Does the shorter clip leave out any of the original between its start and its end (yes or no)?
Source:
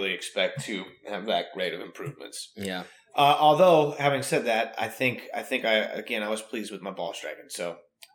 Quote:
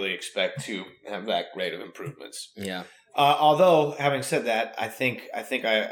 no